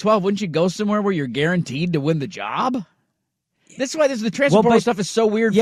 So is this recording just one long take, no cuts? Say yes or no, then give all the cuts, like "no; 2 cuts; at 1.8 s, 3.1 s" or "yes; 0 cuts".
yes; 0 cuts